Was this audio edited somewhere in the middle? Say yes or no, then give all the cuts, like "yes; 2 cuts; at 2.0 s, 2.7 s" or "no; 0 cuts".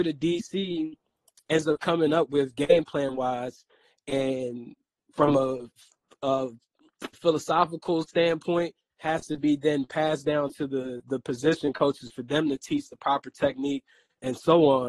yes; 1 cut; at 7.1 s